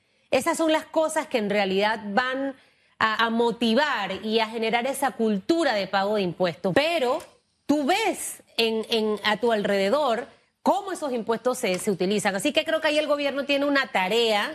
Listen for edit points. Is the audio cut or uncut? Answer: cut